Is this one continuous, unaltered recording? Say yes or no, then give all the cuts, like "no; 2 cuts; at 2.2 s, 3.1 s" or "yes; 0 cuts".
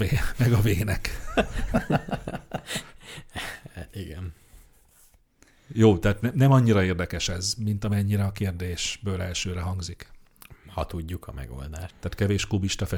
no; 1 cut; at 11.9 s